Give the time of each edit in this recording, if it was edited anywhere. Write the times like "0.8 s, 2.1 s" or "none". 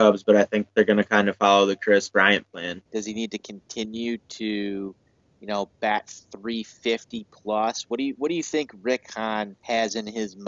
2.9 s